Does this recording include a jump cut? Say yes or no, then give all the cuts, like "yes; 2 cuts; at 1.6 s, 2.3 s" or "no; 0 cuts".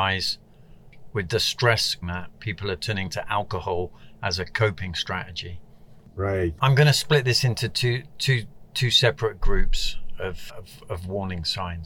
yes; 3 cuts; at 2.0 s, 6.6 s, 10.5 s